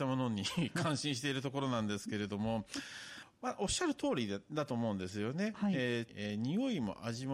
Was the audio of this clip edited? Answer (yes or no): yes